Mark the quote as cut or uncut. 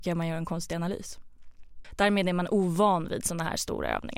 cut